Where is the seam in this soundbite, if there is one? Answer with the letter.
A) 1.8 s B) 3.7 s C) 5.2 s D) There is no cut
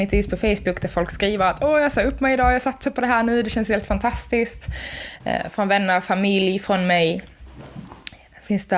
C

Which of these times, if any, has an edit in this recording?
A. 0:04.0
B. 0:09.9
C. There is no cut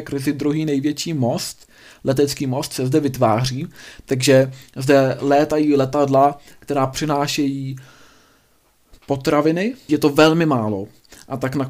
B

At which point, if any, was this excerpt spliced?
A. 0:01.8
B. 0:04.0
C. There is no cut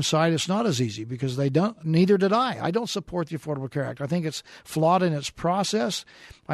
A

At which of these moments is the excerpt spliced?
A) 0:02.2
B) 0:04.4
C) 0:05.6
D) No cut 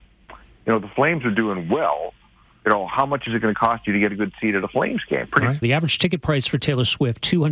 C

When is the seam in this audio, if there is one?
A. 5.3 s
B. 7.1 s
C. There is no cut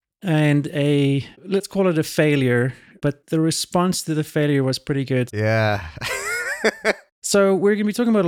A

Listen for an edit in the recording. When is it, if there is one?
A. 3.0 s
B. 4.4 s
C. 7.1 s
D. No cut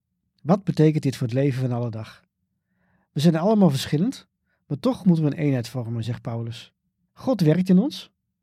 C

